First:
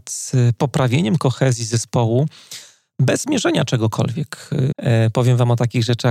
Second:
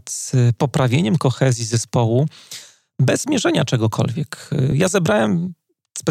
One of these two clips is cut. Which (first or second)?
first